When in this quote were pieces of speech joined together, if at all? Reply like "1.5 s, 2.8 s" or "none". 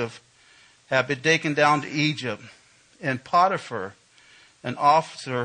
none